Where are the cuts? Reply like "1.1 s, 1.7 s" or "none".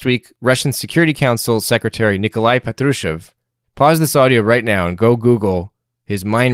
3.6 s